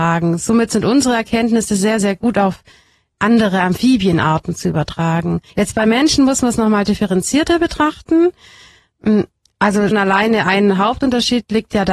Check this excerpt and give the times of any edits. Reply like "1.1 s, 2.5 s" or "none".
5.5 s, 9.9 s